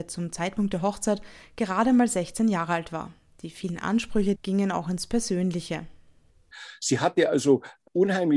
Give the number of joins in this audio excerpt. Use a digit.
1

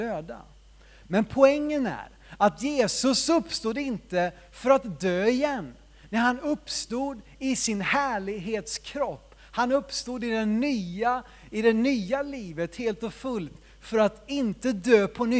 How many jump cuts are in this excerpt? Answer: 0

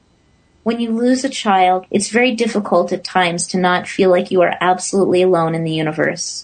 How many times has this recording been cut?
1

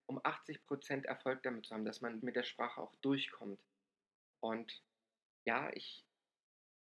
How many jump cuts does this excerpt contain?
2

